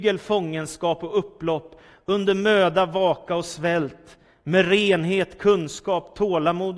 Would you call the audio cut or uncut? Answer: uncut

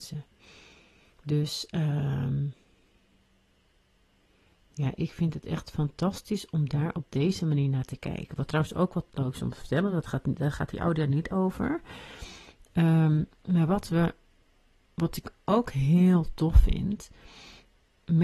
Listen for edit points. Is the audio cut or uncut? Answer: uncut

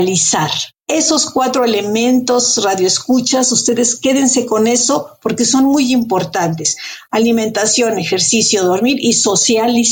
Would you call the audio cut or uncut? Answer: uncut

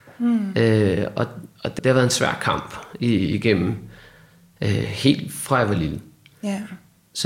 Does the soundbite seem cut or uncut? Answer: cut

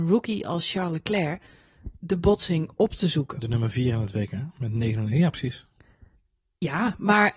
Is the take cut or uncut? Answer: uncut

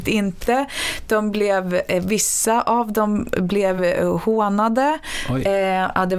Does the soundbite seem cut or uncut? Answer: uncut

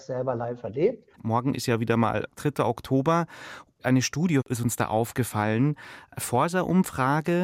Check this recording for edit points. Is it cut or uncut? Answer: cut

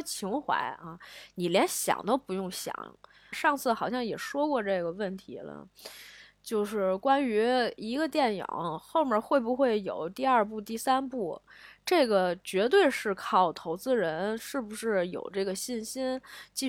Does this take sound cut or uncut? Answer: cut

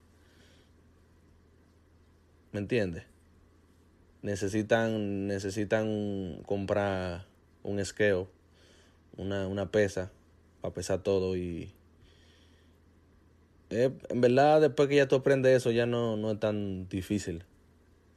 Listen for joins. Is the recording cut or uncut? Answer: uncut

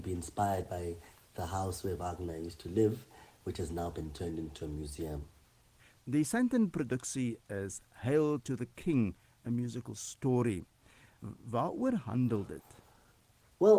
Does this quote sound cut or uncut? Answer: uncut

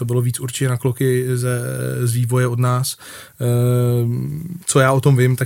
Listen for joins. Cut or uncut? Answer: uncut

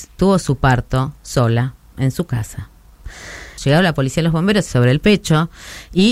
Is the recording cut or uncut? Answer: cut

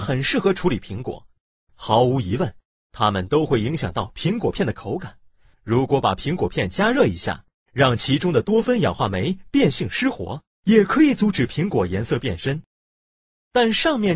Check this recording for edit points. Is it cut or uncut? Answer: cut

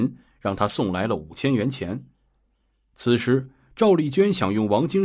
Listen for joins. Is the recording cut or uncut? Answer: uncut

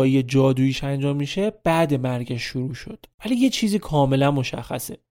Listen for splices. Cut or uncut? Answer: cut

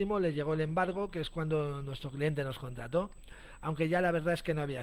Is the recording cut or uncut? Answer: uncut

